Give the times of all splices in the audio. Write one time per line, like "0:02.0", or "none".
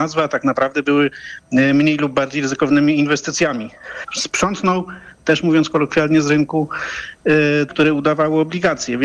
0:04.0
0:07.7